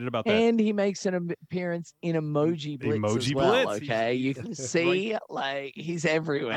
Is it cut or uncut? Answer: cut